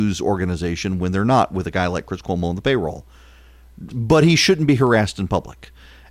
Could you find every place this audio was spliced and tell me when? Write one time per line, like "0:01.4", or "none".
0:03.9

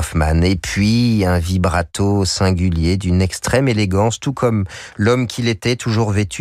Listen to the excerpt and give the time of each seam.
none

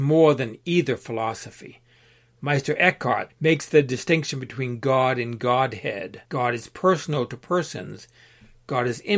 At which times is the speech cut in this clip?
0:03.3
0:06.2

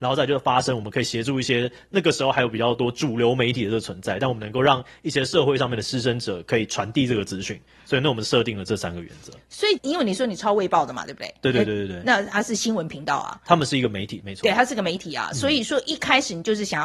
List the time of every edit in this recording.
0:09.8

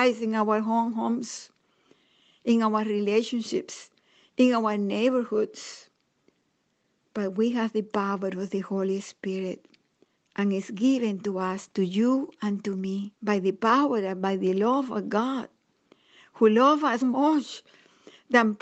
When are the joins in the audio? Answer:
0:10.2
0:13.2
0:17.0

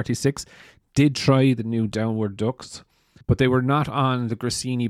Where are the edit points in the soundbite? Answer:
0:03.2

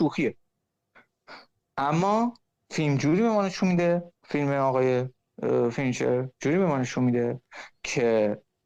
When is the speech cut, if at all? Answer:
0:04.2

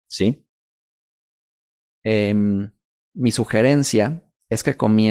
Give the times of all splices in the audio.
0:01.8

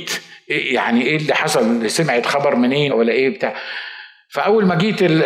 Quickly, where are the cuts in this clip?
0:01.0
0:02.9

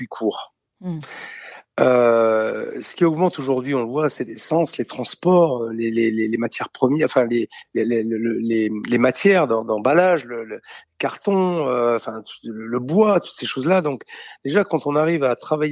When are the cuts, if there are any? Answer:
none

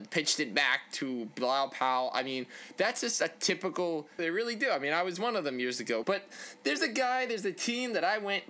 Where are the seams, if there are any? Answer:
0:04.2
0:06.0

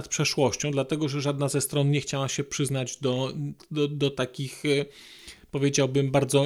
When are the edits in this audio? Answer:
none

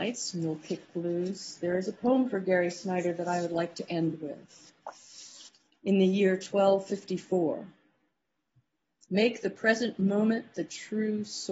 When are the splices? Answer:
0:05.7

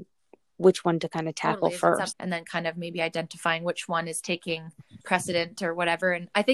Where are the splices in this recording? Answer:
0:02.1
0:05.0

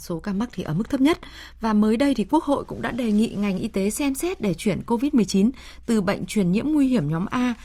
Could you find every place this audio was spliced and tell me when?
none

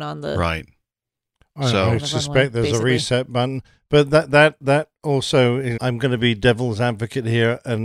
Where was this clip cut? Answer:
0:05.8

